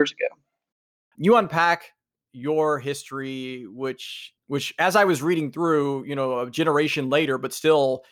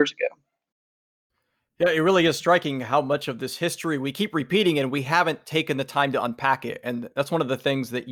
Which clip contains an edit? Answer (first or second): first